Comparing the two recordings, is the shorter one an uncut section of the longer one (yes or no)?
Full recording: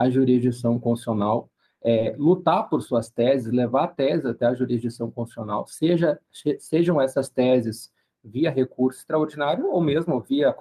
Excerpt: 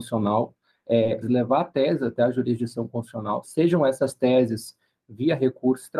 no